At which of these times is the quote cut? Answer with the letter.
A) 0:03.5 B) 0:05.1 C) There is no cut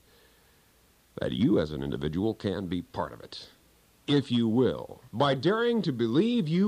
B